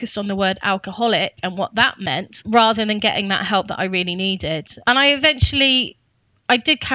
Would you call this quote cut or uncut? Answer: uncut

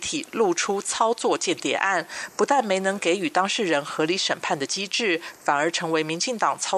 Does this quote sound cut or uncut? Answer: cut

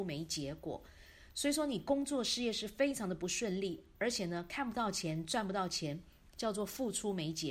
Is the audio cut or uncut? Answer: uncut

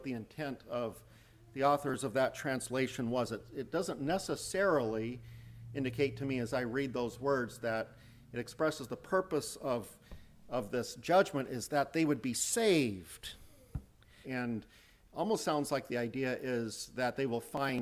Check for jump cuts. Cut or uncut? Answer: cut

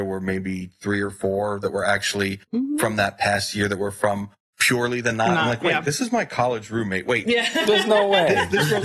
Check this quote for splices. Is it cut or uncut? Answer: uncut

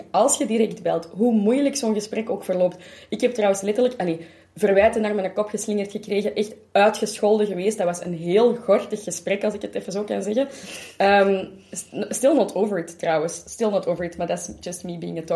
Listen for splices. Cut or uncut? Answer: uncut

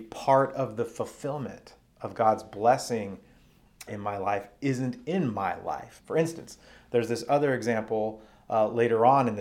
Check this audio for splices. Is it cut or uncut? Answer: cut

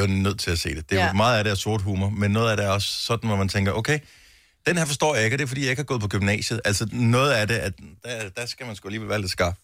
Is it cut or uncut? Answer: uncut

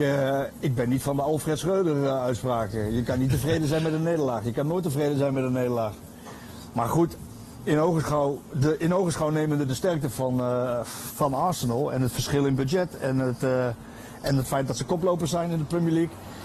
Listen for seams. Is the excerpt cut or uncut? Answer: uncut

